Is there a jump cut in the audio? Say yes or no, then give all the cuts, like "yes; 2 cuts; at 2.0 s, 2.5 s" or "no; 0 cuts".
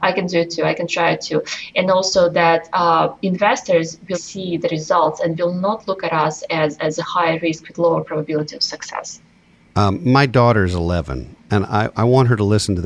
yes; 1 cut; at 4.1 s